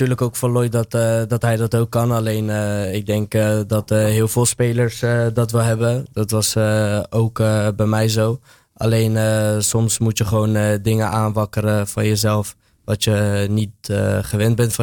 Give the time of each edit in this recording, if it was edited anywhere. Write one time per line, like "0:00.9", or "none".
none